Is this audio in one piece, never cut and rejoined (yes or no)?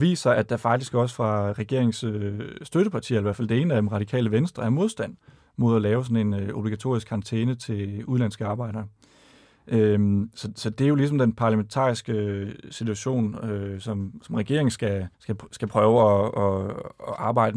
no